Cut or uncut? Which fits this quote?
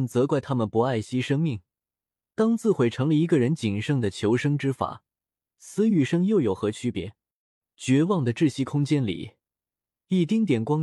uncut